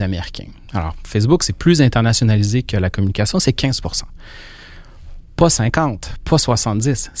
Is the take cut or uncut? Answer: uncut